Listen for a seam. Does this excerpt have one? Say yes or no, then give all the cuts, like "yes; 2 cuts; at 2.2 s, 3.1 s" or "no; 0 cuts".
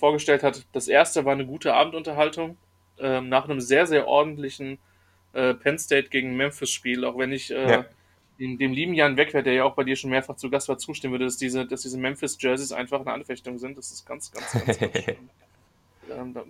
no; 0 cuts